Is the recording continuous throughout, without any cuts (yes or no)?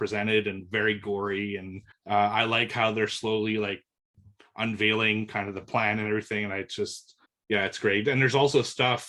yes